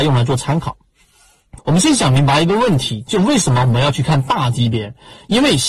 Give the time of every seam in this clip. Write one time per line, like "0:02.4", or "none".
0:01.6